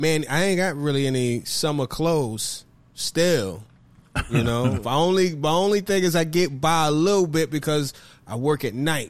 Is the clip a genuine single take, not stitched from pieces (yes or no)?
no